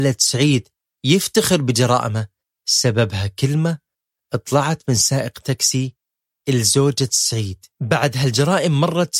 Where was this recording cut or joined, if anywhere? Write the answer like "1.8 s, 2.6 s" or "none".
7.7 s